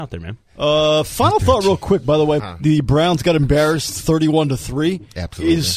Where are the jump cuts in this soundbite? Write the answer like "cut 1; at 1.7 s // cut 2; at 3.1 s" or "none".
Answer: cut 1; at 2.4 s